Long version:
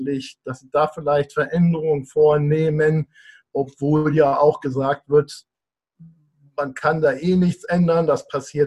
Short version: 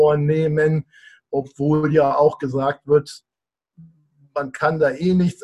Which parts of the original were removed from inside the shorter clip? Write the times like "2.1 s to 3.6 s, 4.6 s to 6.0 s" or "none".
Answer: none